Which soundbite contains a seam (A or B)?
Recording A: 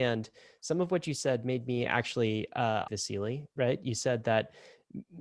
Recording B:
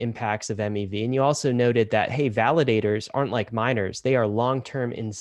A